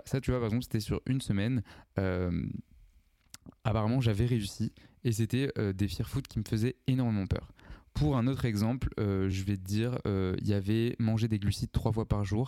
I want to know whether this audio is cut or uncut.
uncut